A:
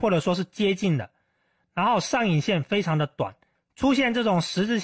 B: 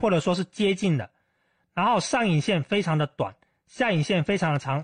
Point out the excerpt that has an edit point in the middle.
A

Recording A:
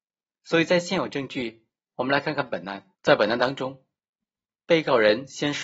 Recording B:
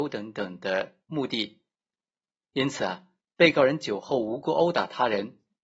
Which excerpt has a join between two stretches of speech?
A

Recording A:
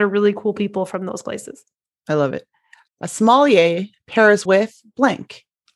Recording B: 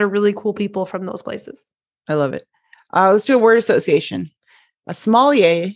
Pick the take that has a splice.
A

